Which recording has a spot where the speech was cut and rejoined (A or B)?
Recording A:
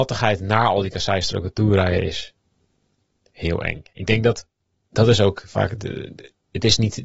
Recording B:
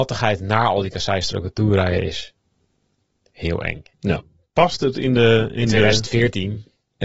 B